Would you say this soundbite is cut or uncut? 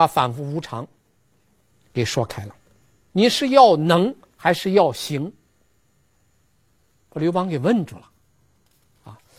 cut